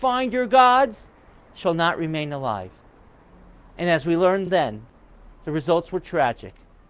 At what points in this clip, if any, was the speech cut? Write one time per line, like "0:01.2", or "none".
none